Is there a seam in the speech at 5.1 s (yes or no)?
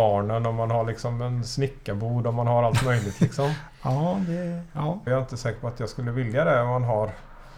yes